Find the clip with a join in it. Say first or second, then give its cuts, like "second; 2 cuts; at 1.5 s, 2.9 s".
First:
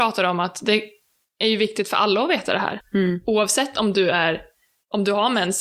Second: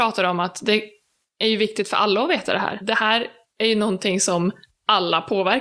first; 1 cut; at 2.8 s